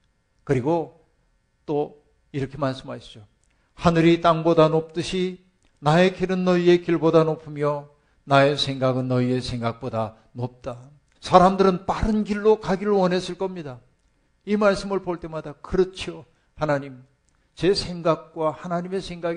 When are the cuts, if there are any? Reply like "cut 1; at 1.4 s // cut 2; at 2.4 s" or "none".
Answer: cut 1; at 11.2 s // cut 2; at 14.3 s